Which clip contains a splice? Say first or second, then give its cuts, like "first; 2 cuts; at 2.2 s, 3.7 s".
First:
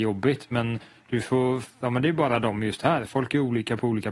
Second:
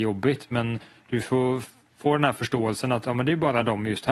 first; 1 cut; at 1.8 s